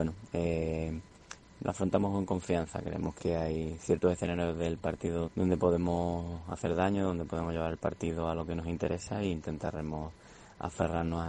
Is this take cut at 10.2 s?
no; 2 cuts; at 3.2 s, 5.2 s

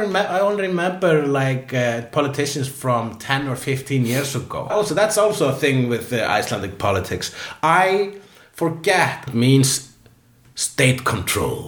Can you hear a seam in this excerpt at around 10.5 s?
no; 2 cuts; at 4.7 s, 9.3 s

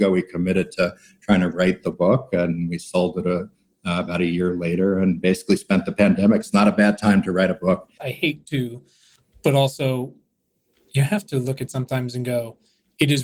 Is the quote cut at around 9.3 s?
no; 1 cut; at 8.0 s

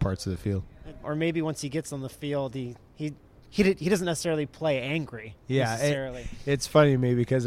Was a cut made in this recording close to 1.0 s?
yes; 1 cut; at 1.0 s

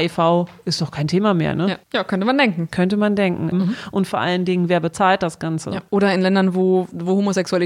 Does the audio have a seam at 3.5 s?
yes; 1 cut; at 3.5 s

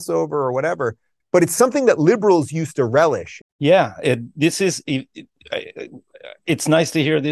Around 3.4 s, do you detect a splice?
yes; 2 cuts; at 1.2 s, 3.4 s

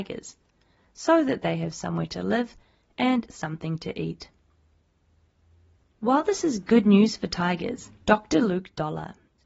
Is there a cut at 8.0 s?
yes; 1 cut; at 8.0 s

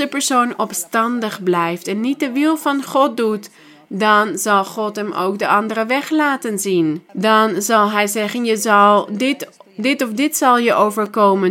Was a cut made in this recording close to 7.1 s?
yes; 1 cut; at 7.1 s

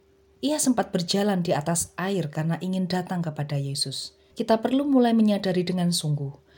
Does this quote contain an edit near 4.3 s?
yes; 1 cut; at 4.3 s

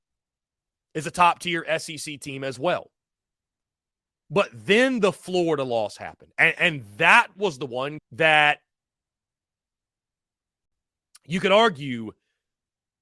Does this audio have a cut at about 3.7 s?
no; 1 cut; at 8.0 s

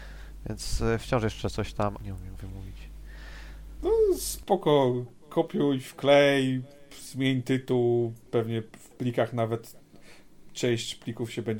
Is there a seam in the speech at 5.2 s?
no; 2 cuts; at 1.9 s, 3.8 s

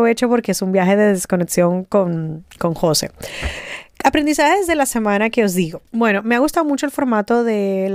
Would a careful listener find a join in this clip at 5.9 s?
yes; 1 cut; at 5.9 s

